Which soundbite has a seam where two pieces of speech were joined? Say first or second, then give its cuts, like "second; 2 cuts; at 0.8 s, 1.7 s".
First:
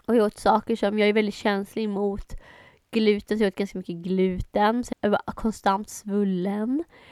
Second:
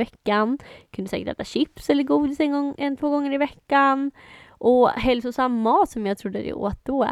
first; 1 cut; at 4.9 s